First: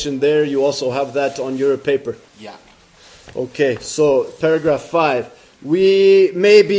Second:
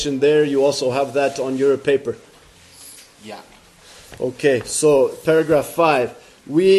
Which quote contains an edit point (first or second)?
first